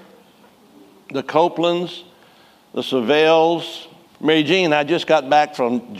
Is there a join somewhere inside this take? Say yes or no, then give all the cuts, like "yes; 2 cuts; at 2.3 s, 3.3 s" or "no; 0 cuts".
yes; 1 cut; at 4.1 s